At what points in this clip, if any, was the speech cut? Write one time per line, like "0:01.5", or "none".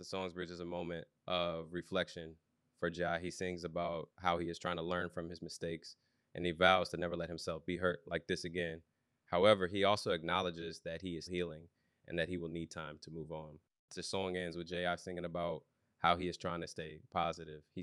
0:11.3